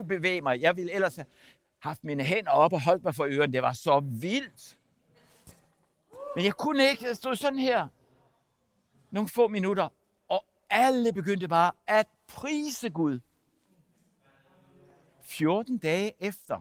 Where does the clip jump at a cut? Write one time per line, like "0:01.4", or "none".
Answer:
none